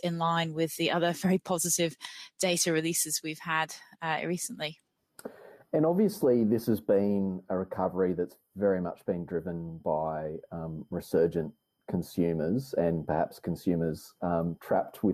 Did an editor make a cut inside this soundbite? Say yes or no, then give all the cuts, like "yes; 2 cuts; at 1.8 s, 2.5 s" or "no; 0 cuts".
no; 0 cuts